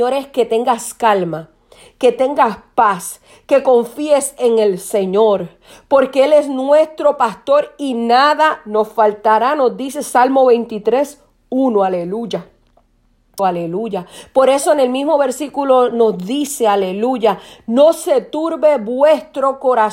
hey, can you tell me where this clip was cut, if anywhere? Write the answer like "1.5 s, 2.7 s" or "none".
13.4 s